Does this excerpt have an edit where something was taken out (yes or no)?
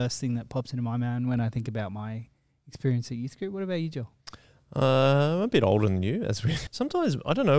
yes